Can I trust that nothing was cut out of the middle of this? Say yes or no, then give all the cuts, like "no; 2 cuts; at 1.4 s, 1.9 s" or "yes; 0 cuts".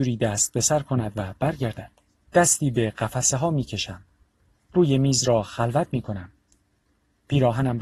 no; 1 cut; at 2.3 s